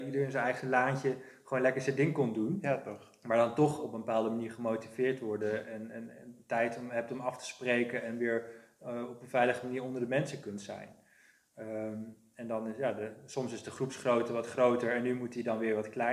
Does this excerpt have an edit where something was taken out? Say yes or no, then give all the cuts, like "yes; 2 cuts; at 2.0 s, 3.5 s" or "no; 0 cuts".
no; 0 cuts